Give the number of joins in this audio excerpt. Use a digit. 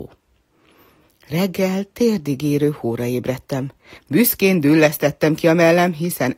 1